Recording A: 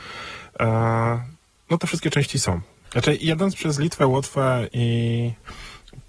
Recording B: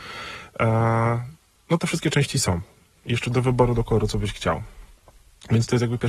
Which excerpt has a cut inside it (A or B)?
A